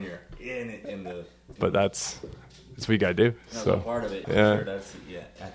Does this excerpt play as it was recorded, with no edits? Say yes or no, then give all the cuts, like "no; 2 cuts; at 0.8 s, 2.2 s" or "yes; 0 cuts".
no; 2 cuts; at 1.6 s, 4.2 s